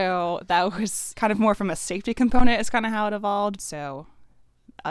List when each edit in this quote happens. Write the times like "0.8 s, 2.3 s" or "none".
3.6 s